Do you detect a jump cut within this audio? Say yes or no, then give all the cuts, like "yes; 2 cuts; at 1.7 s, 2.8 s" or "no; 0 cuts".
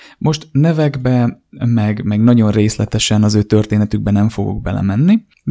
no; 0 cuts